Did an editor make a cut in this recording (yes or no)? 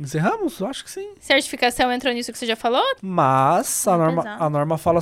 yes